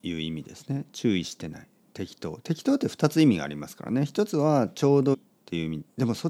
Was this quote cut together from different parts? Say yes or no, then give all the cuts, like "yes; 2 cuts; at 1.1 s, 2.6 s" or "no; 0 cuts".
yes; 1 cut; at 5.1 s